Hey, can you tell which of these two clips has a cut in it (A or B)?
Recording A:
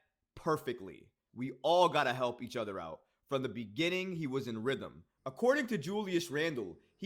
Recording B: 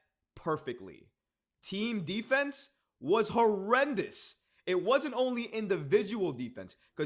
A